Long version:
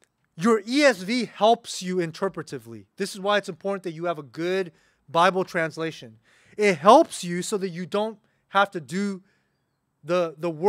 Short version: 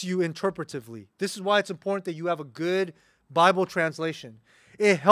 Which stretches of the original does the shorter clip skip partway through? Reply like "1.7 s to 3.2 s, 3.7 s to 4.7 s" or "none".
none